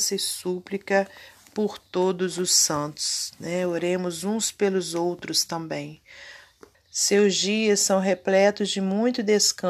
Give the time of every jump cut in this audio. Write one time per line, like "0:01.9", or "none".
0:06.7